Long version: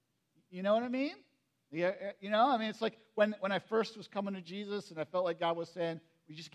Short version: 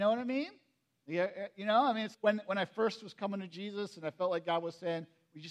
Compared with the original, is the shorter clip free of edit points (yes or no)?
no